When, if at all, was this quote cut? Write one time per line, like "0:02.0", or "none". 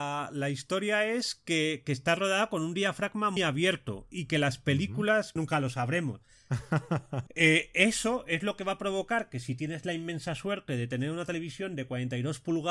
0:03.4
0:05.4
0:07.3